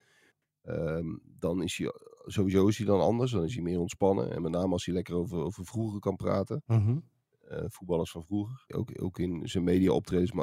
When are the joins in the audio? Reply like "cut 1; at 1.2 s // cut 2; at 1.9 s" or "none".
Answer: cut 1; at 8.7 s